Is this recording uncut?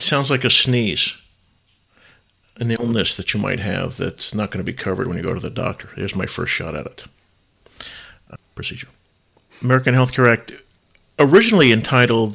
yes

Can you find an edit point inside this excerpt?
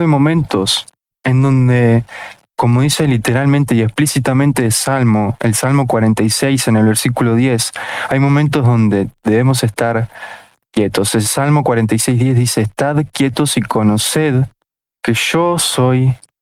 yes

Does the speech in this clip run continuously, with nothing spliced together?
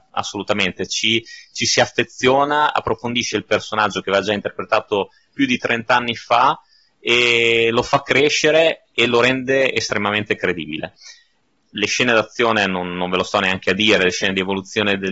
yes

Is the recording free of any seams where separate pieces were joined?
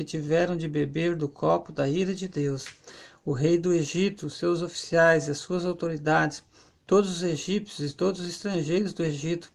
yes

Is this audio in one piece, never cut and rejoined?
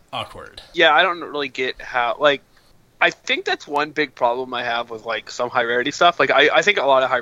yes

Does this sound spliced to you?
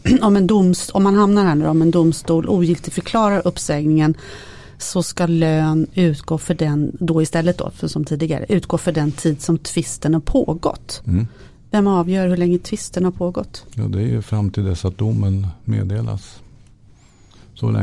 no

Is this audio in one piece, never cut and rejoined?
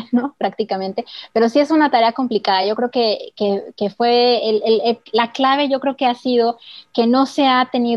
yes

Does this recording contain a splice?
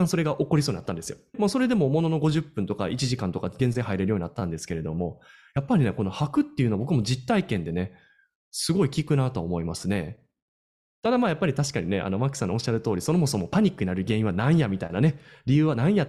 yes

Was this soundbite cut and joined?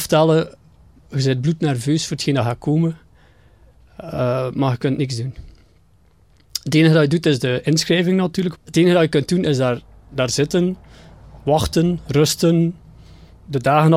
yes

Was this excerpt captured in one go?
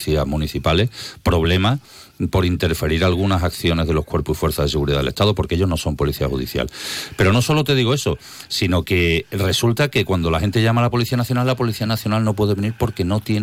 yes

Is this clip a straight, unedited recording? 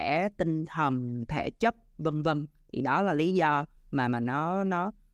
yes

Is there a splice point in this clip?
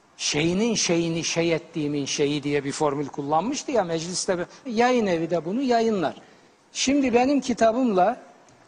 yes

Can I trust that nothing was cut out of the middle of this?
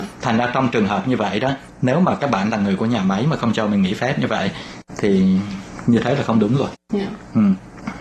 yes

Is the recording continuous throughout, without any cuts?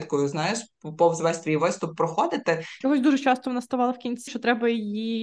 no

